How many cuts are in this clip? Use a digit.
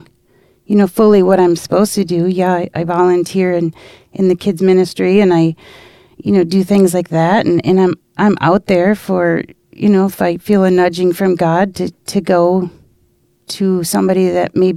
0